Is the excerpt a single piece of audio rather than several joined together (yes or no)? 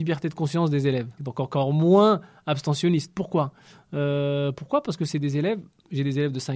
no